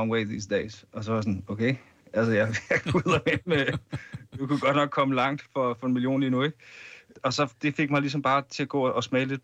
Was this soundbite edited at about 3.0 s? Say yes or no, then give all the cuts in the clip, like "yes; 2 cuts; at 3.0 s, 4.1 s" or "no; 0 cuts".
no; 0 cuts